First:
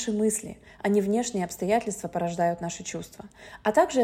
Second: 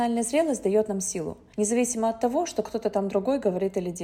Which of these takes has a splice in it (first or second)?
second